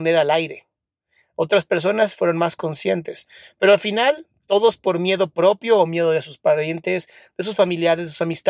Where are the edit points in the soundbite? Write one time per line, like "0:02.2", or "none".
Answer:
none